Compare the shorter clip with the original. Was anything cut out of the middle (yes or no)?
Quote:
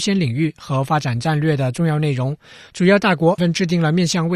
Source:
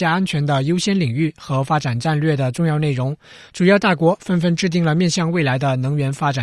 yes